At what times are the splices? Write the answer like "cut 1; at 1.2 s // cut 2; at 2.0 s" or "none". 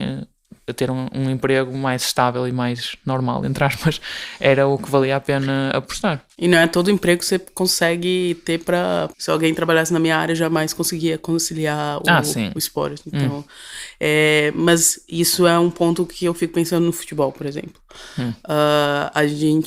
cut 1; at 9.1 s